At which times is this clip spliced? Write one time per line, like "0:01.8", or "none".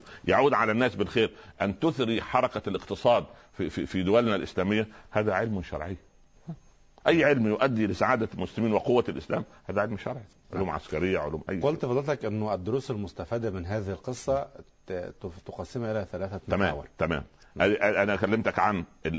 none